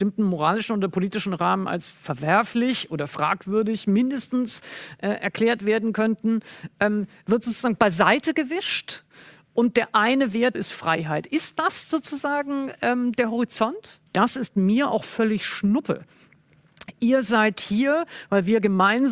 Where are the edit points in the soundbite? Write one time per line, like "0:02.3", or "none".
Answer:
0:10.5
0:14.1